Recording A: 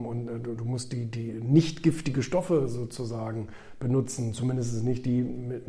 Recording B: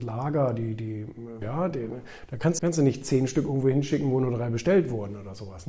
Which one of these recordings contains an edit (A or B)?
B